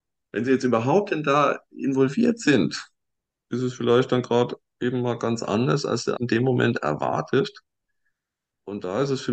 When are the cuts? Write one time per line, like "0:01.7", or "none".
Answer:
0:03.3
0:06.2